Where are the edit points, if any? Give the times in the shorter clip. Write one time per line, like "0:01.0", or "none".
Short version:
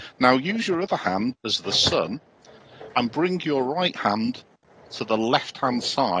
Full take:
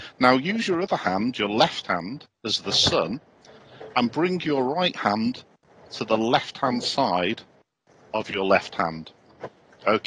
0:01.3